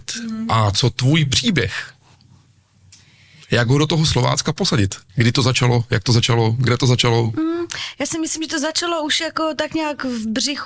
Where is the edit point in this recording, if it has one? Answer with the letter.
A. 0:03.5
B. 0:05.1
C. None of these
B